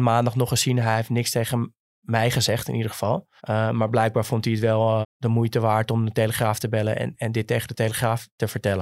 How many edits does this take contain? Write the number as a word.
two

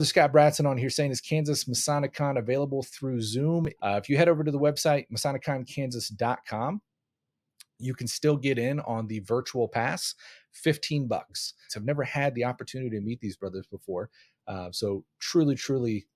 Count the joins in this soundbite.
two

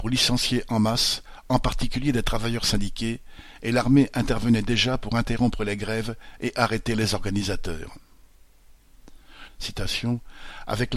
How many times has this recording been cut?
one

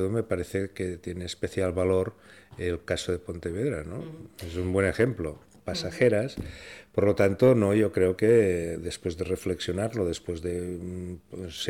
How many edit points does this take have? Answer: one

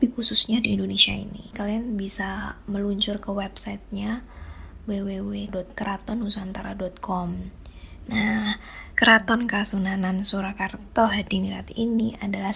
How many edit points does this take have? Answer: two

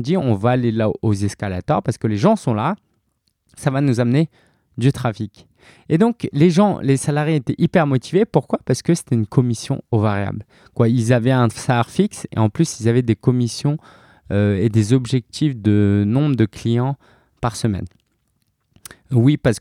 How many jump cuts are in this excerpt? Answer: one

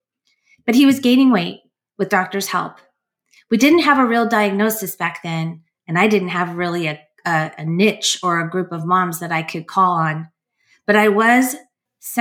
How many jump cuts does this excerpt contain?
zero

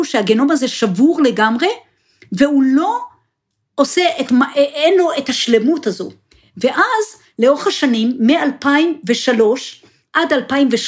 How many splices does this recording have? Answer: zero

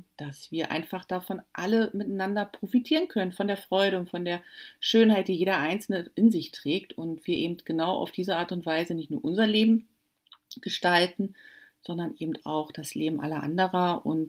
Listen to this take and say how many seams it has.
zero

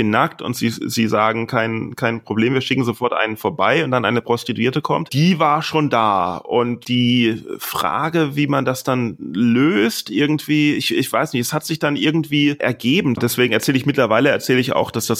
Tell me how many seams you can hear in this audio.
one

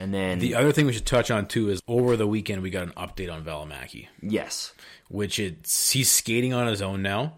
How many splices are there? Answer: one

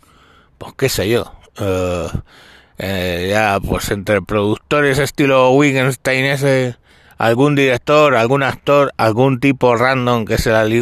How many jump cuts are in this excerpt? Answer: zero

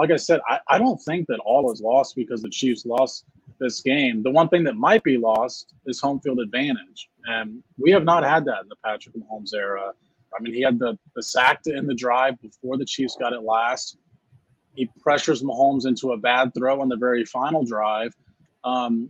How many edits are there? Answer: one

